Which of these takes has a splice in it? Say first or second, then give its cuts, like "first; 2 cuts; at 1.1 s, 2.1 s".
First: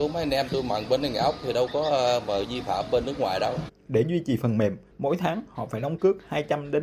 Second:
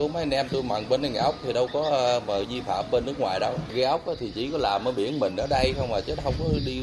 first; 1 cut; at 3.7 s